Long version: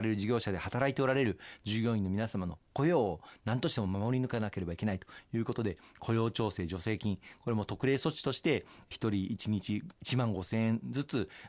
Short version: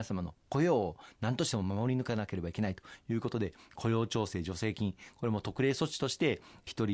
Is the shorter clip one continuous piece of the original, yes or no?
yes